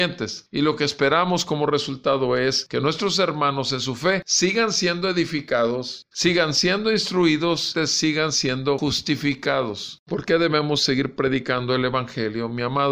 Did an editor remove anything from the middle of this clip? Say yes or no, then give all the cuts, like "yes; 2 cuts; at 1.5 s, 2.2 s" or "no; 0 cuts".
yes; 2 cuts; at 6.1 s, 10.0 s